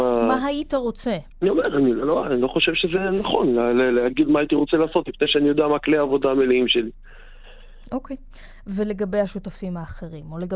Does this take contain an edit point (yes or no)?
yes